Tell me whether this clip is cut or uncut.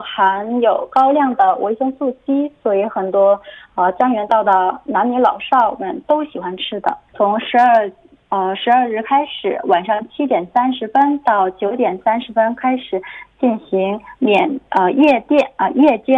cut